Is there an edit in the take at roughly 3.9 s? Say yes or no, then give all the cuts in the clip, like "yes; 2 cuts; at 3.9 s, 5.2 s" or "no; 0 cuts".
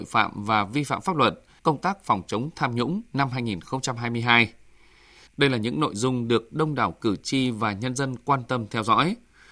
no; 2 cuts; at 1.6 s, 5.3 s